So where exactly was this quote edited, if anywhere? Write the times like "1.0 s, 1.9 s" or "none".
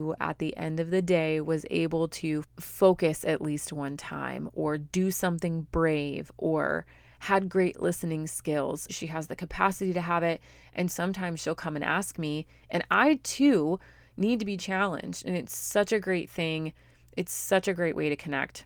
2.4 s, 8.9 s, 10.9 s